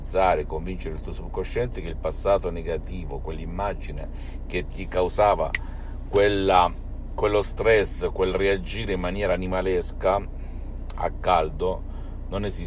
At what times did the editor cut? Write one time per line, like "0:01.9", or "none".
none